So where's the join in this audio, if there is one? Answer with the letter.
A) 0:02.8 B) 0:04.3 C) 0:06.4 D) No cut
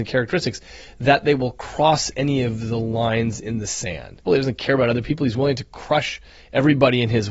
B